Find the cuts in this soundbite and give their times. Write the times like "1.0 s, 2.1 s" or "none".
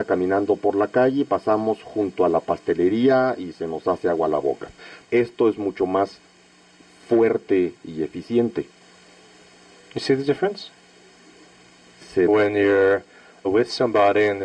5.0 s, 12.3 s